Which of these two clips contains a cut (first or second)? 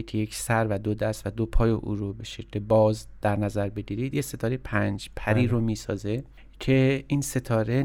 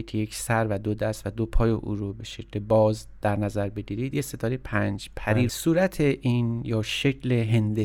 second